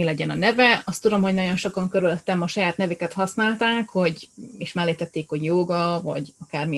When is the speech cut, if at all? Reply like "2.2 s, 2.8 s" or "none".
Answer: none